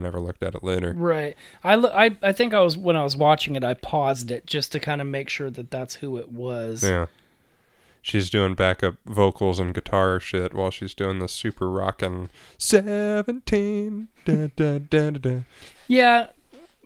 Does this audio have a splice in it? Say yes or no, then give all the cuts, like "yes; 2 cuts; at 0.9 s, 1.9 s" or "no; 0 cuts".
no; 0 cuts